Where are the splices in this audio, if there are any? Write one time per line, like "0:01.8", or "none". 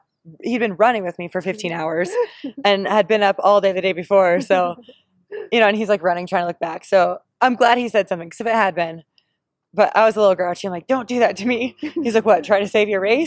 none